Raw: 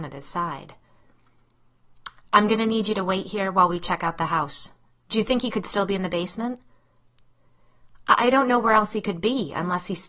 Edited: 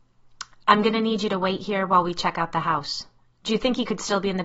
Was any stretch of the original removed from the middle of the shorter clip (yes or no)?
no